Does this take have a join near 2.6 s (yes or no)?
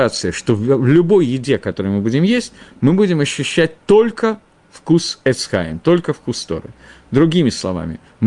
no